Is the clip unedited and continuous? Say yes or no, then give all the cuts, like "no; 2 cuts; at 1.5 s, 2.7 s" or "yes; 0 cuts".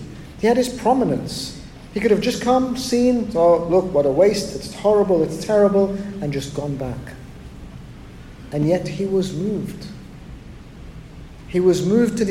yes; 0 cuts